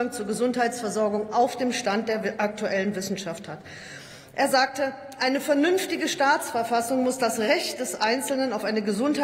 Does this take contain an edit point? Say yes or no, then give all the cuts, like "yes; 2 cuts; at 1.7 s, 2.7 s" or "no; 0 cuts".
no; 0 cuts